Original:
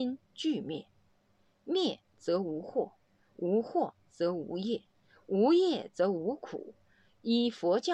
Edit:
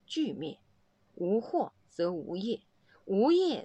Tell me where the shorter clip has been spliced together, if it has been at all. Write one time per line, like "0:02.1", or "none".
0:01.1